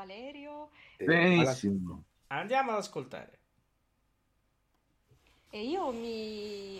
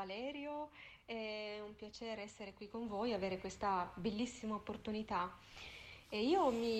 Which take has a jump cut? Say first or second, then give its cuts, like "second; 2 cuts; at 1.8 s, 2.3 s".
first; 2 cuts; at 1.0 s, 5.5 s